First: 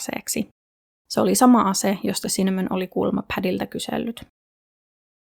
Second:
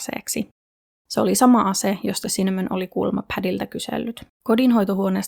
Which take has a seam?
second; 1 cut; at 4.3 s

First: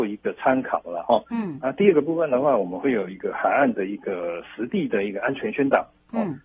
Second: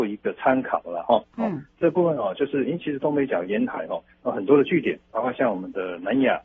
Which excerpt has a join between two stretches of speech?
second; 1 cut; at 1.2 s

